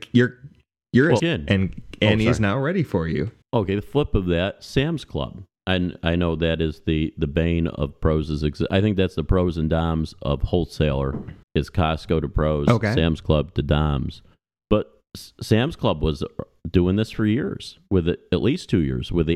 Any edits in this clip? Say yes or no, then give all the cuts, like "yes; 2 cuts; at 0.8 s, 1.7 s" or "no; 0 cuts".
yes; 3 cuts; at 1.2 s, 3.4 s, 11.4 s